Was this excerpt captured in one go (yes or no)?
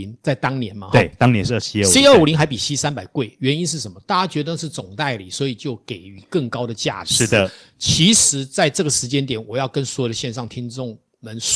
yes